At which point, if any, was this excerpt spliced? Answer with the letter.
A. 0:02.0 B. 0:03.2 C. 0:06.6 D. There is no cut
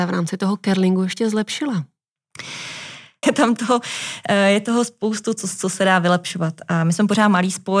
B